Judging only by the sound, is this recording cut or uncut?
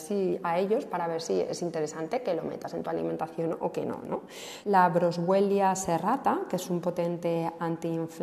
cut